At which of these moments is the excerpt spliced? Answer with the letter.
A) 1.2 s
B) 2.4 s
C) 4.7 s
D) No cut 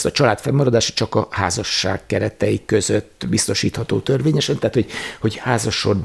D